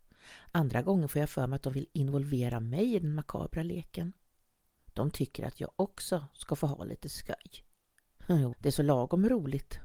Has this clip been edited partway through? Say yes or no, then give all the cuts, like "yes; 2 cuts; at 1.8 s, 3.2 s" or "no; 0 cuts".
yes; 1 cut; at 8.5 s